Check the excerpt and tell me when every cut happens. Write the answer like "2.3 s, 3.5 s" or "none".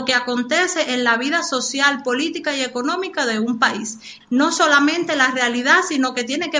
4.2 s